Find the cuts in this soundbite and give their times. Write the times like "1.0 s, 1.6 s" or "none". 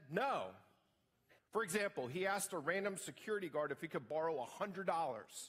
1.4 s